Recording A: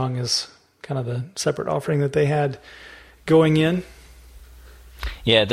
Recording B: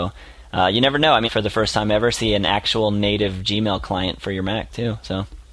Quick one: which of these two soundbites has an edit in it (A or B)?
B